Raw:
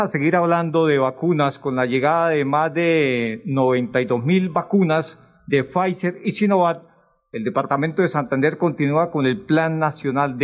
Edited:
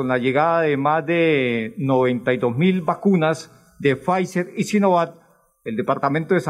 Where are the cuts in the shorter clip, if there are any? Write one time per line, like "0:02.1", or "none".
none